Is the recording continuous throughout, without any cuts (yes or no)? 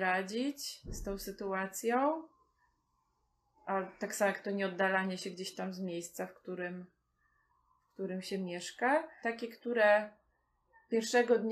no